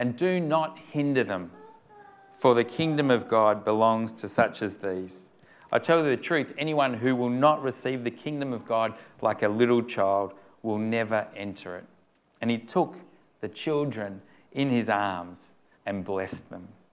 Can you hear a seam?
yes; 1 cut; at 15.7 s

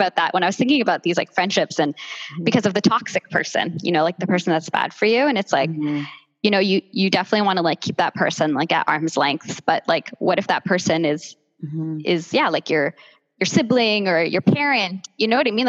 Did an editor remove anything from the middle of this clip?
no; 0 cuts

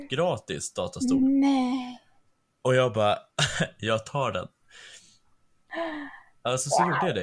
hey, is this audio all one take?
no; 1 cut; at 3.3 s

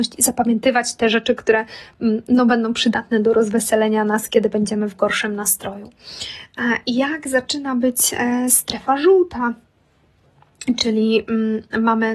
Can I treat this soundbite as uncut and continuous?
yes; 0 cuts

